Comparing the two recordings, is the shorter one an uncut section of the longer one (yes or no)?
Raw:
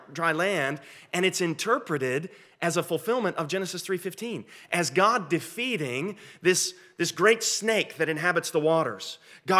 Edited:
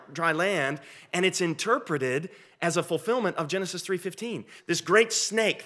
no